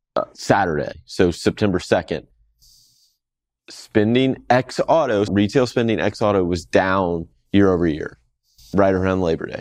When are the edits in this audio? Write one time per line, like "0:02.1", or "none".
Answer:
0:05.3